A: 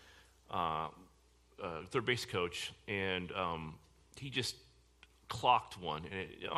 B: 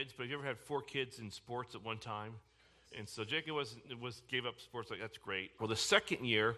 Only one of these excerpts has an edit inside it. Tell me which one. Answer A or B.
B